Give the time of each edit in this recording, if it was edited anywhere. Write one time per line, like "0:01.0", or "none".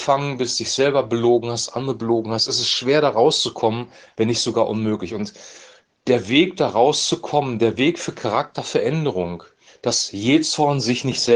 0:09.7